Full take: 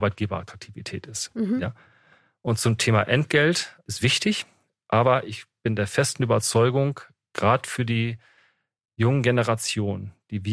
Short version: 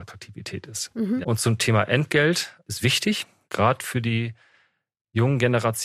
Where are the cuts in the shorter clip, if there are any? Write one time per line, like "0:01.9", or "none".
0:01.2
0:03.5